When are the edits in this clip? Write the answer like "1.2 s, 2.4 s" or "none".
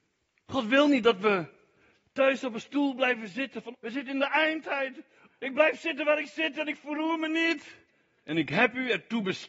3.7 s, 5.3 s, 8.2 s

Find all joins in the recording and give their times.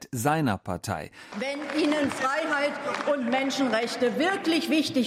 1.3 s

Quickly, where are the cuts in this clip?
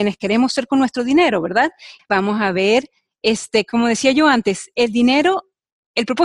2.0 s

